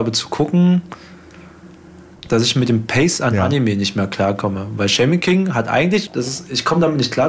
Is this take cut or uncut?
cut